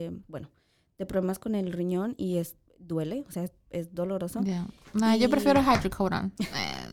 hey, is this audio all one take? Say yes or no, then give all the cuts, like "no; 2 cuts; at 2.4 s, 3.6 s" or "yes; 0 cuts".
yes; 0 cuts